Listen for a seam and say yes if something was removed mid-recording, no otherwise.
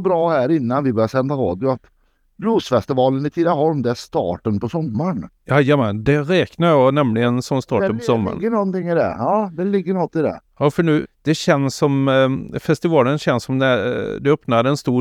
yes